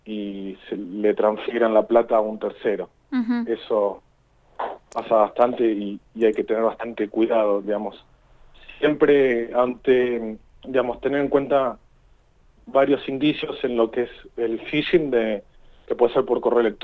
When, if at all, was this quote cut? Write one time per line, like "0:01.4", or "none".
none